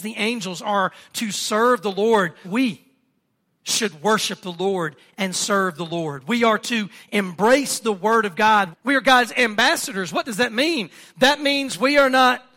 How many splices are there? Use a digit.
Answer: 2